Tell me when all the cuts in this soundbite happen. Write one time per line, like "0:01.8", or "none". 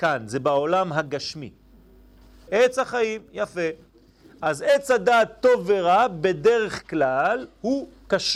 0:02.5